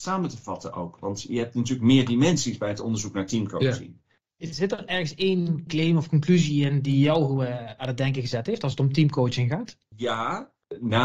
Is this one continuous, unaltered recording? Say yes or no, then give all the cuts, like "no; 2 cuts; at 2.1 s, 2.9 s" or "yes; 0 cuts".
yes; 0 cuts